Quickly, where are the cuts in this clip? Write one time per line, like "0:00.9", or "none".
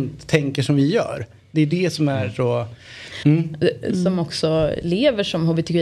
0:03.2